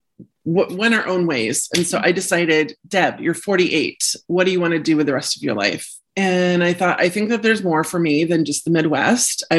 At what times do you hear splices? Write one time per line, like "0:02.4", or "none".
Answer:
0:06.1